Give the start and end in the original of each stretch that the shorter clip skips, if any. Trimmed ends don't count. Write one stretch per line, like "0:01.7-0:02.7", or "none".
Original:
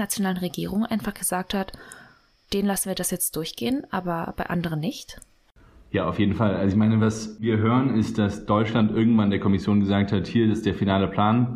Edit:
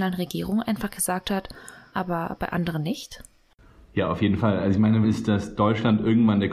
0:02.1-0:03.9
0:07.0-0:07.9